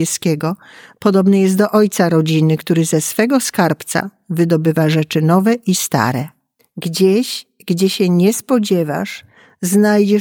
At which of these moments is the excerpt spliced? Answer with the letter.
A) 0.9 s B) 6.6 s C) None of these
B